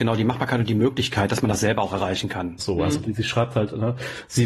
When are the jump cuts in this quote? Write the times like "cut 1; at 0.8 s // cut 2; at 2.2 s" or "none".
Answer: cut 1; at 2.6 s